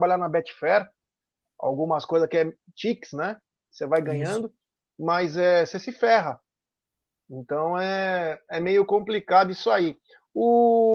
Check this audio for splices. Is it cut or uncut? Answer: uncut